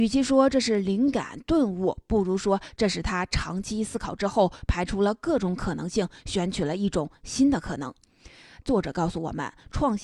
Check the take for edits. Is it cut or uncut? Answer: cut